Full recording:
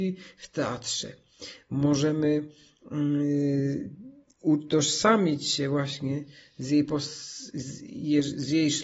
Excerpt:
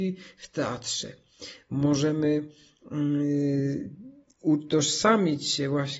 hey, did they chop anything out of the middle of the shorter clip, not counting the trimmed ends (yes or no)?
no